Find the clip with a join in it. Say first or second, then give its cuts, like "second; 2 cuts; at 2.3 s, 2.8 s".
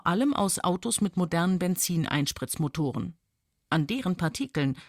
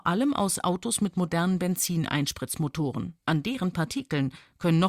second; 1 cut; at 3.2 s